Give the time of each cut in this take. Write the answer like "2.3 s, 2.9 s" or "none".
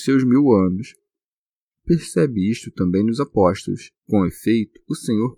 1.7 s, 4.0 s